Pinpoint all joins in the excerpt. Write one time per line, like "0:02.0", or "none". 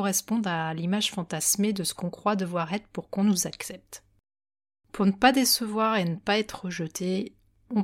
none